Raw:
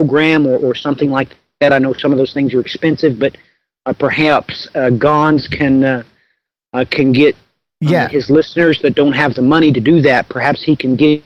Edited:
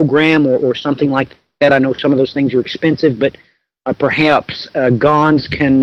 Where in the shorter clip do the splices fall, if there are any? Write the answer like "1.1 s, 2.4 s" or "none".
none